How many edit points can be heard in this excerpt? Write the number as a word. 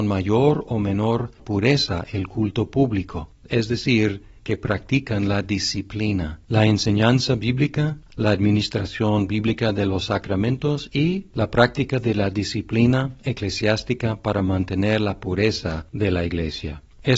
one